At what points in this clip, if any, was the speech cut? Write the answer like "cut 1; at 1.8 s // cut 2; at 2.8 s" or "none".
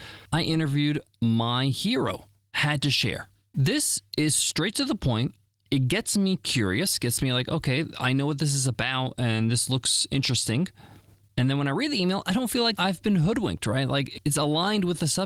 none